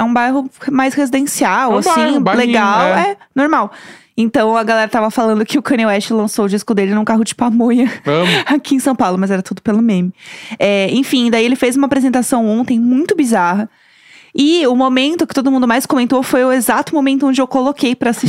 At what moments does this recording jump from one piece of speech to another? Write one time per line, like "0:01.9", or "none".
none